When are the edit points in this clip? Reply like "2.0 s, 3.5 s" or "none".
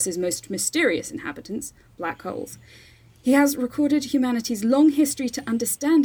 none